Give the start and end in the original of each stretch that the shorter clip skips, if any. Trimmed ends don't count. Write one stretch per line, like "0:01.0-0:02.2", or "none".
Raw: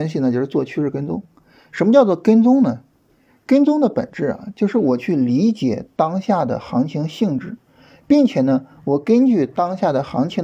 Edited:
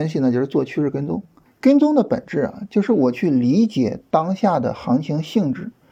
0:01.5-0:03.3